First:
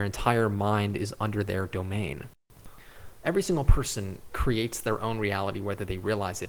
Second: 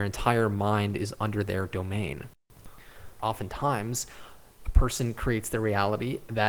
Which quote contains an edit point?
second; 1 cut; at 3.2 s

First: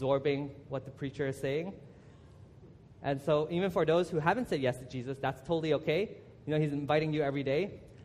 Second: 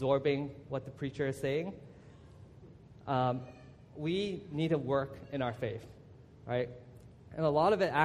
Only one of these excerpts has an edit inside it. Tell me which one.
first; 1 cut; at 3.0 s

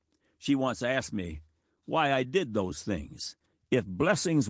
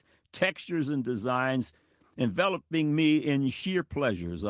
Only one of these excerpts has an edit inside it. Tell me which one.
first; 1 cut; at 3.5 s

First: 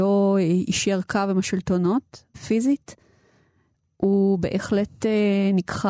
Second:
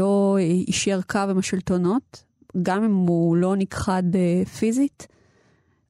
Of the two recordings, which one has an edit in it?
first; 1 cut; at 2.3 s

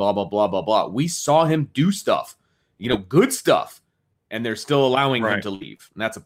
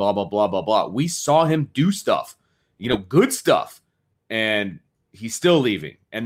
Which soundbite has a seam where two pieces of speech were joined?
first; 1 cut; at 4.2 s

